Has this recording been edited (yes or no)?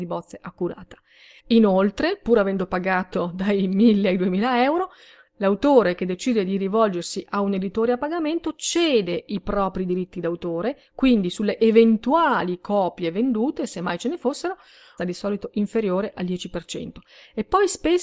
yes